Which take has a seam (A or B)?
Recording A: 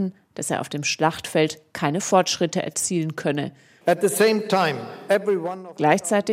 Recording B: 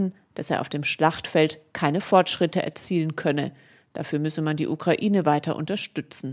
A